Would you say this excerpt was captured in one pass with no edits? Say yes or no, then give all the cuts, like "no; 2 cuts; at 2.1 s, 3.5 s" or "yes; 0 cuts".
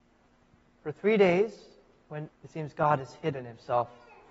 no; 1 cut; at 2.3 s